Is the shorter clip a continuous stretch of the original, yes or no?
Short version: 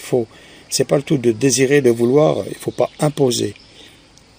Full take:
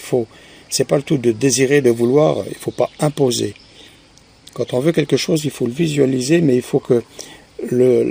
yes